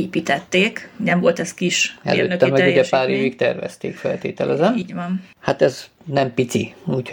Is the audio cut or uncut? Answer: uncut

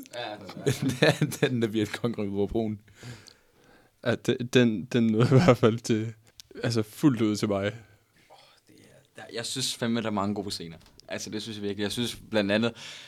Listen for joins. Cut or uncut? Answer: uncut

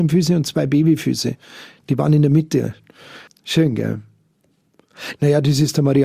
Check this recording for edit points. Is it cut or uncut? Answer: cut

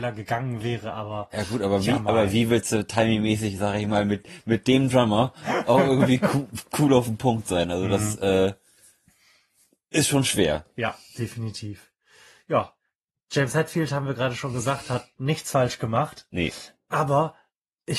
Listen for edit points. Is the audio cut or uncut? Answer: uncut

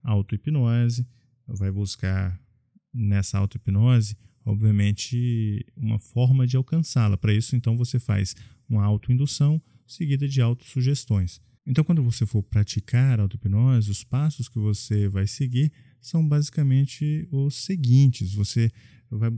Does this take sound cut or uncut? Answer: cut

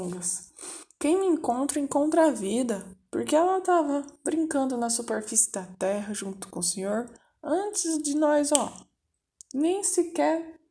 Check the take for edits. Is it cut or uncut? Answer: uncut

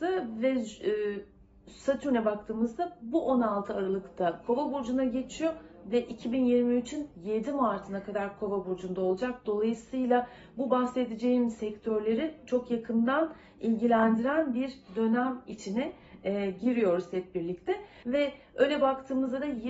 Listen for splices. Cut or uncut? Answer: cut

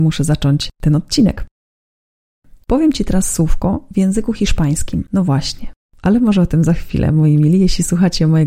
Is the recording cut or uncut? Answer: cut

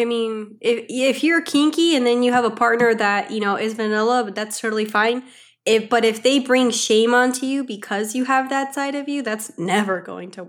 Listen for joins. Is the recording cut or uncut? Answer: uncut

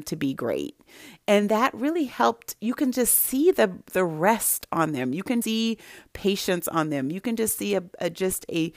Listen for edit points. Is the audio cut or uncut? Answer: cut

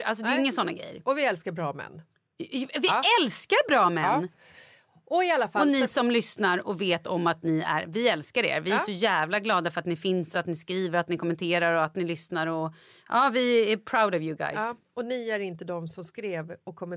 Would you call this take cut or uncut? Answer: uncut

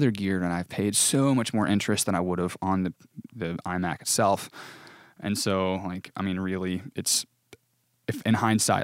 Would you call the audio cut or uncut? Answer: uncut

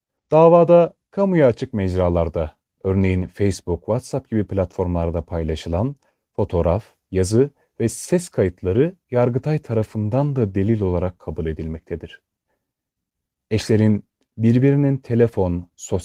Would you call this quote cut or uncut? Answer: uncut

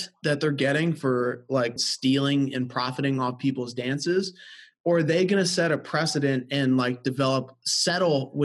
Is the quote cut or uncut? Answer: cut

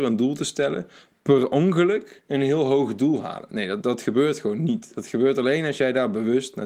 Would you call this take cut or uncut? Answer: cut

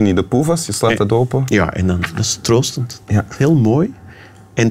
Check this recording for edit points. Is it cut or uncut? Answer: uncut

